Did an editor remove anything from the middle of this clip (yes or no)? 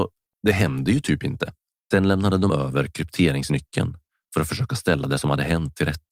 yes